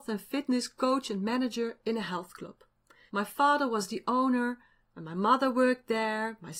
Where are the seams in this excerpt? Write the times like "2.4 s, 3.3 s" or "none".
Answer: 3.1 s